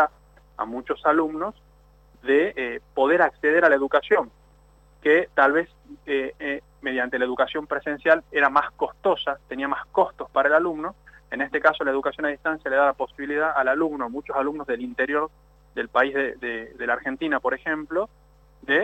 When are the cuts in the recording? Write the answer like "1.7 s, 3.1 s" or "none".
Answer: none